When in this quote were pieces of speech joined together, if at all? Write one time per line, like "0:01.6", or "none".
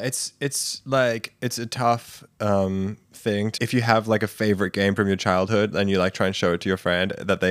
0:03.6